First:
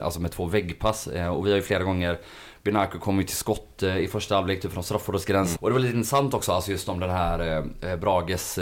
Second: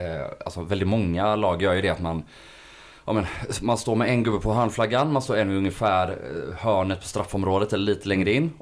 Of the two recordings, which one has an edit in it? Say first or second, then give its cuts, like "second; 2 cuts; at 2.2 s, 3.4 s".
first; 1 cut; at 5.6 s